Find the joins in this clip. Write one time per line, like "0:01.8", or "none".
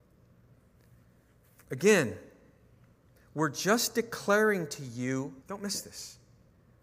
0:03.2
0:05.4